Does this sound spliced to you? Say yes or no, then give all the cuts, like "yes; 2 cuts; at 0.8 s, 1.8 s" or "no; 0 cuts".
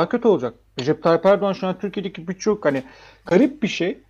no; 0 cuts